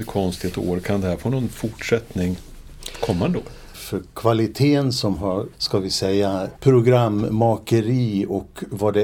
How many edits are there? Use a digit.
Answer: 3